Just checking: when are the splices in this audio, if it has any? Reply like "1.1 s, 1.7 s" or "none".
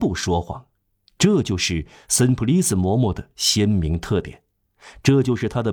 1.1 s